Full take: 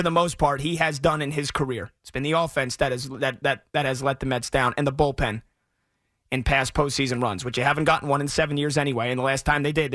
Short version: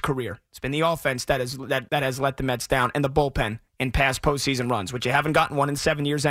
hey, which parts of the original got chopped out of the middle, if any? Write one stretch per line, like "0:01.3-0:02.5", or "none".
0:03.4-0:03.7
0:05.5-0:06.2